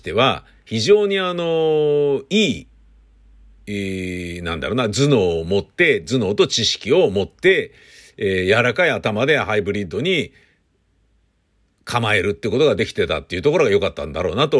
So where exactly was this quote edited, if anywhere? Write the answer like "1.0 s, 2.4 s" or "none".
none